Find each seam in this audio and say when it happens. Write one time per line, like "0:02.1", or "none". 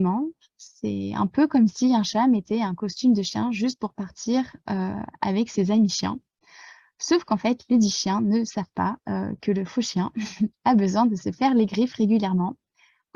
none